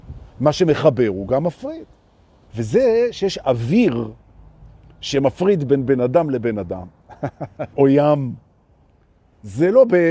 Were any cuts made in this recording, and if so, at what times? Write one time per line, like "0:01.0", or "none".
0:02.5
0:07.7